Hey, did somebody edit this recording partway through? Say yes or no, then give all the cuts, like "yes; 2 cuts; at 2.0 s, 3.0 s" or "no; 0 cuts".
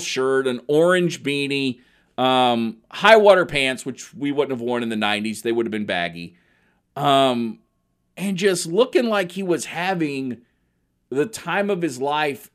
no; 0 cuts